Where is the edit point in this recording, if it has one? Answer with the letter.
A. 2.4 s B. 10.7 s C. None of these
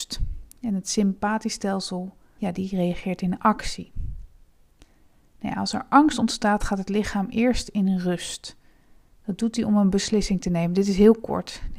A